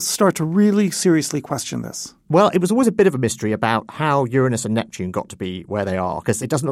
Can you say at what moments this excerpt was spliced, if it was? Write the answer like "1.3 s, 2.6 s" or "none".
none